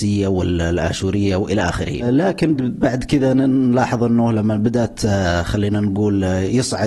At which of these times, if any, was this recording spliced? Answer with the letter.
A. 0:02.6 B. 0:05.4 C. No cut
A